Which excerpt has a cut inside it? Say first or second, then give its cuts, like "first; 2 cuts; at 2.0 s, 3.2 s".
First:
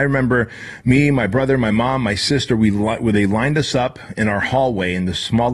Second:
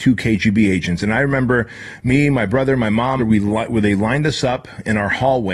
second; 1 cut; at 3.2 s